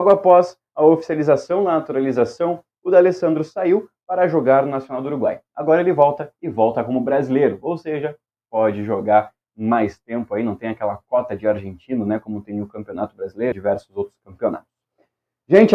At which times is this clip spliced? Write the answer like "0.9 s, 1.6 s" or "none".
13.5 s